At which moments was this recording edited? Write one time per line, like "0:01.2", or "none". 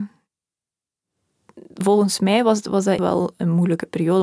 0:03.0